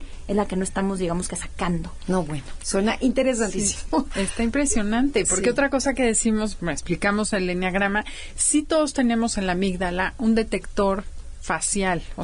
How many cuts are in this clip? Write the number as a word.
zero